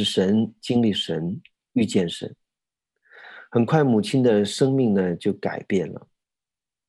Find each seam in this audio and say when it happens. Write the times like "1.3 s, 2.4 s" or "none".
none

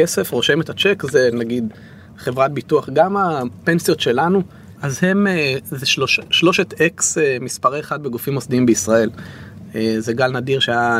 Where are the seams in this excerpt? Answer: 4.8 s, 6.3 s

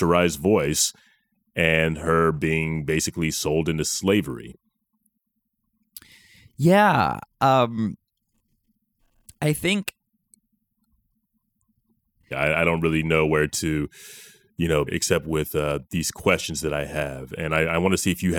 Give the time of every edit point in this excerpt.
12.3 s, 14.9 s

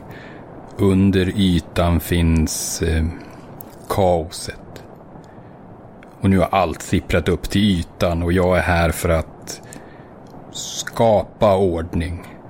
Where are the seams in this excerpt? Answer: none

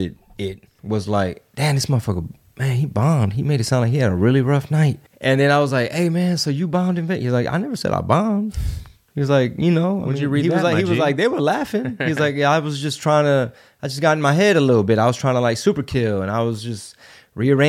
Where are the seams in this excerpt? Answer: 5.1 s

